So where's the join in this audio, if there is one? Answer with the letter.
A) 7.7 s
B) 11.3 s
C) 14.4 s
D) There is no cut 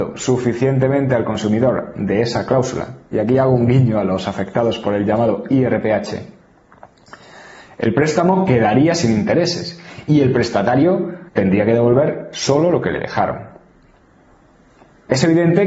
B